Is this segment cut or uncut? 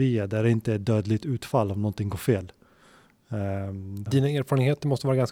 cut